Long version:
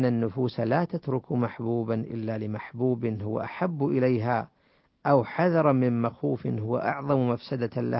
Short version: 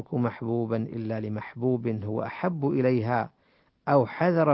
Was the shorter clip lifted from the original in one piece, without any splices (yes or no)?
yes